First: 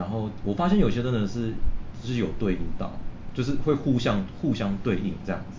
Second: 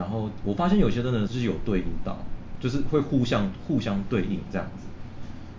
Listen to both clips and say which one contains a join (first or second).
second